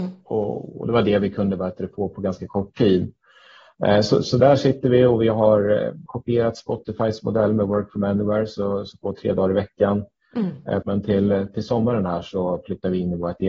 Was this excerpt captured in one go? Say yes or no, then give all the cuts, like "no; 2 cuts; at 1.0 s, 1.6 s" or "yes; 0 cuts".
no; 3 cuts; at 6.1 s, 9.0 s, 10.8 s